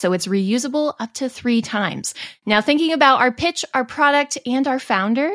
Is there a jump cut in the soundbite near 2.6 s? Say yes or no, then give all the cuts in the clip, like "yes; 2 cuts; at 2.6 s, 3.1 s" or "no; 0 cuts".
no; 0 cuts